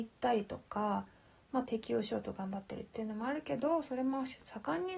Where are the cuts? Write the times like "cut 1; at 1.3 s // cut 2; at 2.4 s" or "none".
cut 1; at 1.6 s